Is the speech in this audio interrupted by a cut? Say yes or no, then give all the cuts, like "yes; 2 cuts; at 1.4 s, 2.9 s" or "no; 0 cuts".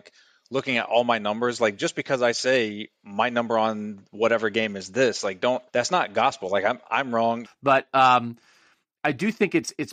yes; 2 cuts; at 5.7 s, 7.4 s